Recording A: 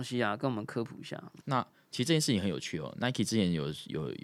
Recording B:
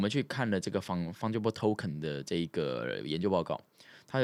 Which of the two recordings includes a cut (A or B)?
A